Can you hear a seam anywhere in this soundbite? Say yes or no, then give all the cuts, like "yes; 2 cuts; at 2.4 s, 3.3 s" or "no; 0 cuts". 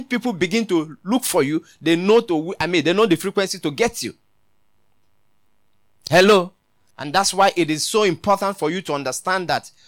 yes; 1 cut; at 6.9 s